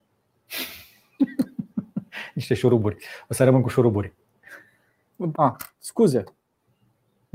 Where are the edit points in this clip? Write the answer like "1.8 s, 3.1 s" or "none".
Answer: 5.3 s